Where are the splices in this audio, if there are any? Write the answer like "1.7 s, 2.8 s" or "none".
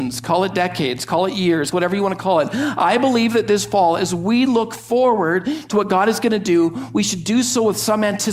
1.7 s